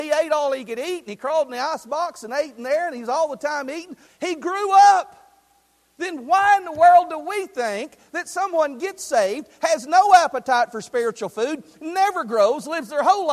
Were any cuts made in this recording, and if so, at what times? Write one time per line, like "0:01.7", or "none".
0:04.1